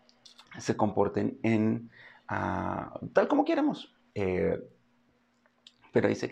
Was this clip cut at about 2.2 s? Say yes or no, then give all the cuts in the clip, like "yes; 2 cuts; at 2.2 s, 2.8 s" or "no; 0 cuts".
no; 1 cut; at 4.1 s